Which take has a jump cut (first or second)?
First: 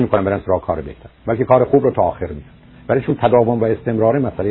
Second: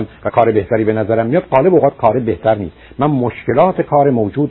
first